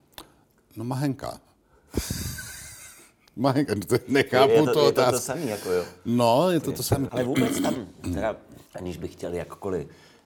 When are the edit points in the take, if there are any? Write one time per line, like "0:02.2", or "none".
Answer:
0:07.1
0:08.7